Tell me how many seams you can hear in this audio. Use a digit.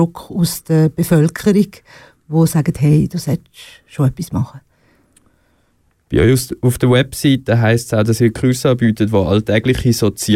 0